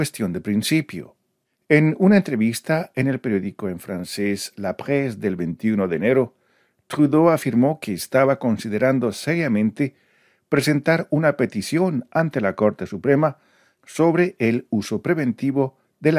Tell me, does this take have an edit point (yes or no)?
no